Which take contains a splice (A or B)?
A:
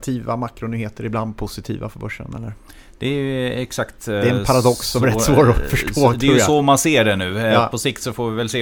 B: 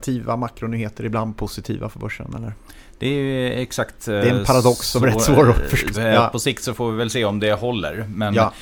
B